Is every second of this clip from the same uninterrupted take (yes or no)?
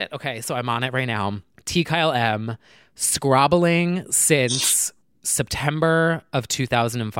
yes